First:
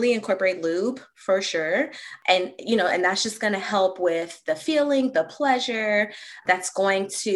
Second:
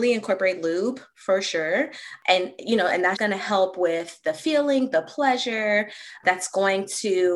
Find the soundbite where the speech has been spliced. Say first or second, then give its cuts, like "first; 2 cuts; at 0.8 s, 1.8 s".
second; 1 cut; at 3.2 s